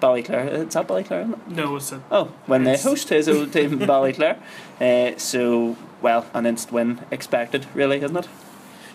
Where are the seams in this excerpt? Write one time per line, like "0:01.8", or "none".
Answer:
0:06.3